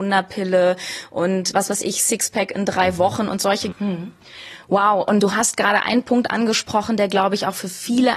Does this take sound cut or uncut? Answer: cut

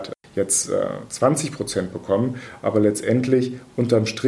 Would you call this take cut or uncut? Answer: uncut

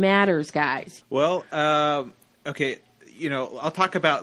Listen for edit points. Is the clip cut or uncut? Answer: cut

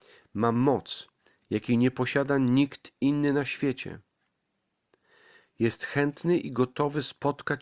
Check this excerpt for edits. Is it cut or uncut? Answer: uncut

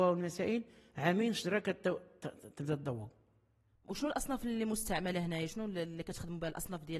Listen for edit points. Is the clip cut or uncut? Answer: uncut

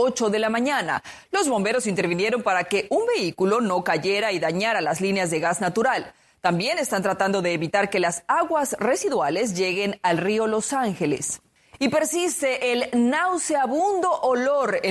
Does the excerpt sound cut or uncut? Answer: uncut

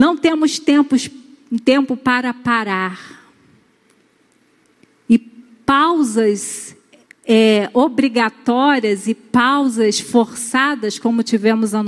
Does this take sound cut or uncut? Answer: uncut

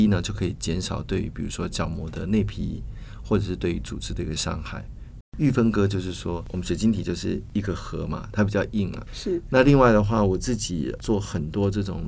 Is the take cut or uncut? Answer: cut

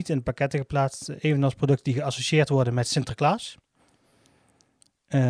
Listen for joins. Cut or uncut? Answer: uncut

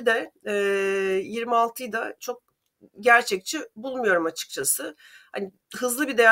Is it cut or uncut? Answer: uncut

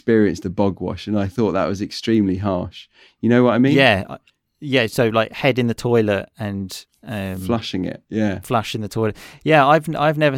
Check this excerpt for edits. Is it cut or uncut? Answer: uncut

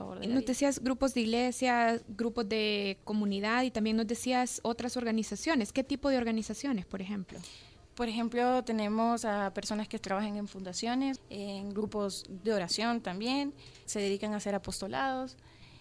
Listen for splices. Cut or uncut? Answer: cut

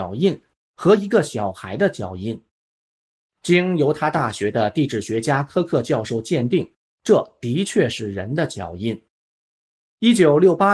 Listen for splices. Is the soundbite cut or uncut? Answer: uncut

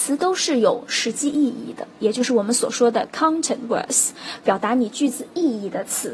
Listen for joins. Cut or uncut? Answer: uncut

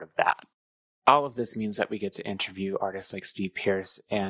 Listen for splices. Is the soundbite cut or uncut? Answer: cut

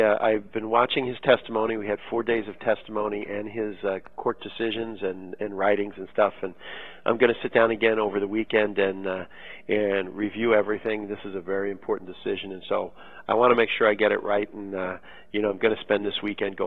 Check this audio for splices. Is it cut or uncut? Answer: uncut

